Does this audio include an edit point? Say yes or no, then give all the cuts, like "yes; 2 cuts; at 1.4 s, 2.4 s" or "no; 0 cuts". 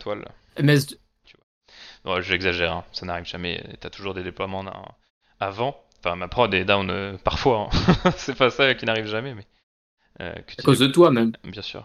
yes; 1 cut; at 1.2 s